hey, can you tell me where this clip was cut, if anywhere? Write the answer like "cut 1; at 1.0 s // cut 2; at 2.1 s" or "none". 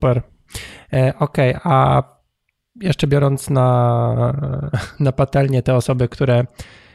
none